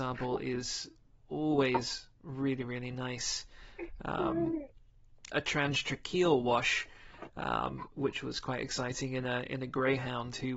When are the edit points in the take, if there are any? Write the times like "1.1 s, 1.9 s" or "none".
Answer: 5.3 s